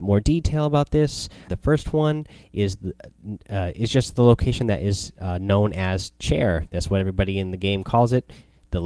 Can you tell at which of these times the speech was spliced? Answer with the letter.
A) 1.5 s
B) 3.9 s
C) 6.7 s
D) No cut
A